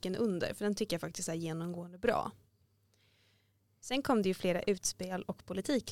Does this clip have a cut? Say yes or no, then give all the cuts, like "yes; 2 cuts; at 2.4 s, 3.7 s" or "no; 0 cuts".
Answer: no; 0 cuts